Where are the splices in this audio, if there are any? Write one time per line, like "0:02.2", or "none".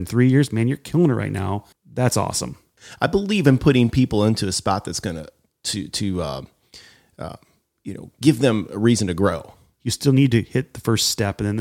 0:01.7
0:09.7